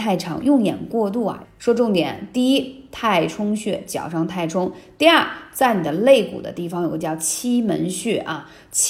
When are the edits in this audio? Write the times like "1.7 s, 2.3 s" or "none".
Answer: 1.4 s